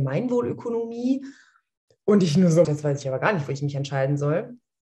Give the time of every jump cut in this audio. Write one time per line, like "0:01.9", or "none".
0:02.6